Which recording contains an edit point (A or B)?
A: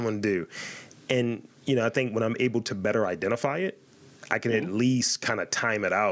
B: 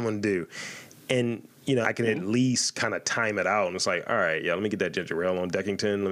B